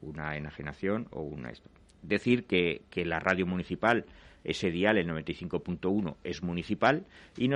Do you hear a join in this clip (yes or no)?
no